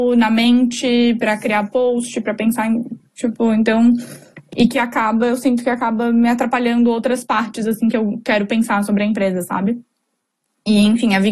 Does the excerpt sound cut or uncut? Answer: uncut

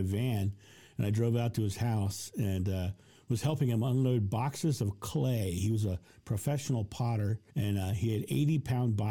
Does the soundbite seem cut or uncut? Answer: cut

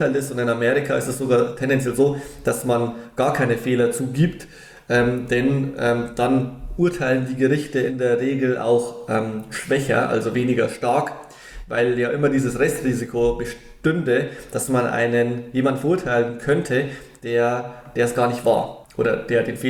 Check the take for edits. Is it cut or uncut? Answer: uncut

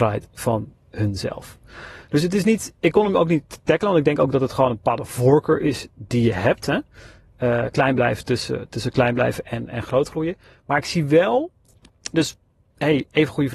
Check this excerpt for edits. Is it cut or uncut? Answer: uncut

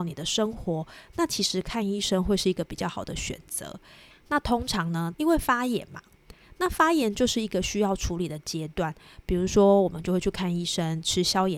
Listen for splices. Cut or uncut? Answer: cut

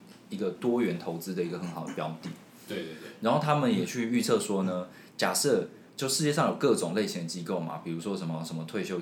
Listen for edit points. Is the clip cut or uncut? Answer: uncut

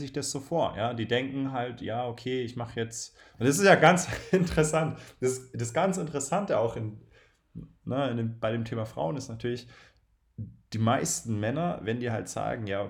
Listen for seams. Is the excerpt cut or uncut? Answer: uncut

